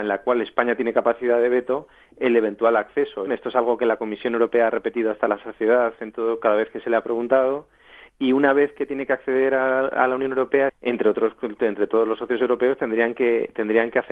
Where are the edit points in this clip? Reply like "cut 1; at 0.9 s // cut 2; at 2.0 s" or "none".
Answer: cut 1; at 3.3 s // cut 2; at 10.7 s